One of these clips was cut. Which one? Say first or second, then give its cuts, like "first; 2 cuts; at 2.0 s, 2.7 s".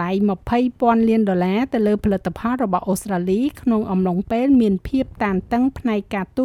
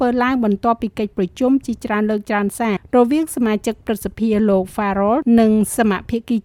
second; 1 cut; at 2.8 s